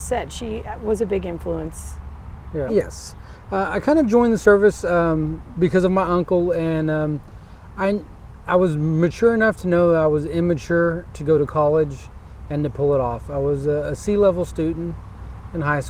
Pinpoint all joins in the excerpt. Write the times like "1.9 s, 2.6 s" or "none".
2.7 s